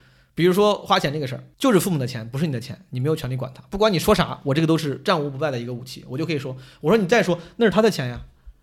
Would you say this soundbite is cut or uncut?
cut